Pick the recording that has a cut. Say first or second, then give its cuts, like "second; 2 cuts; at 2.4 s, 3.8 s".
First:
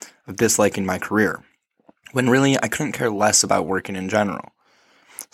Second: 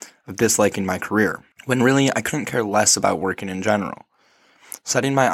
second; 1 cut; at 1.5 s